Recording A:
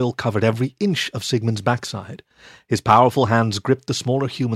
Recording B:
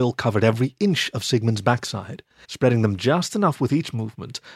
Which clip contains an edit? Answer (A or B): B